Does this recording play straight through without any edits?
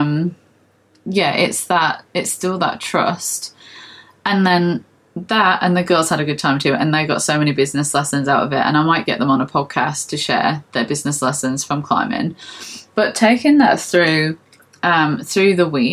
yes; 0 cuts

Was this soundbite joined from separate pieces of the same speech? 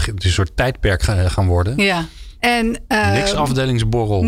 yes; 1 cut; at 2.4 s

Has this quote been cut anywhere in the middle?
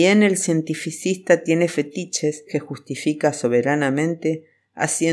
no; 0 cuts

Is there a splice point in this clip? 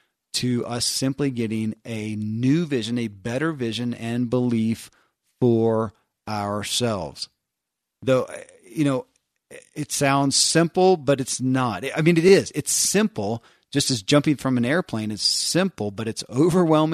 no; 0 cuts

